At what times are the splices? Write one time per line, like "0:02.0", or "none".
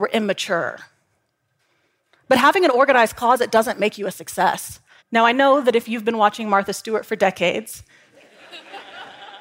0:05.0